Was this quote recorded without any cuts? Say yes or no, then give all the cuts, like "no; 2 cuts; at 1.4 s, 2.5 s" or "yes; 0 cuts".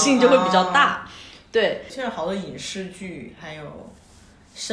no; 1 cut; at 1.9 s